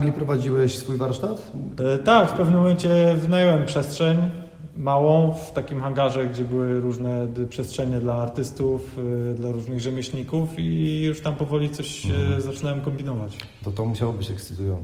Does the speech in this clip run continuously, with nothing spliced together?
no; 1 cut; at 1.8 s

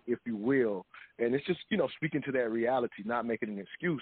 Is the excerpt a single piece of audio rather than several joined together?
yes; 0 cuts

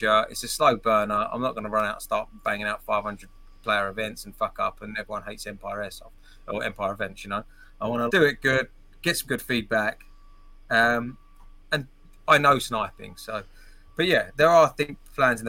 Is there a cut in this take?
yes; 1 cut; at 8.1 s

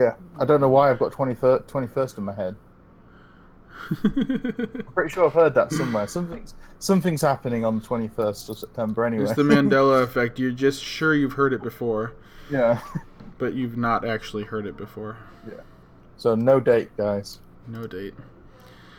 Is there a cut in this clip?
no; 0 cuts

